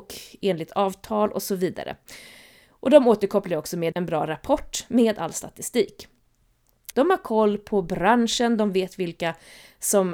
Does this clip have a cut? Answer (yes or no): yes